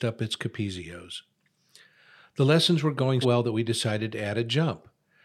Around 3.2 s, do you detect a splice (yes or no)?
yes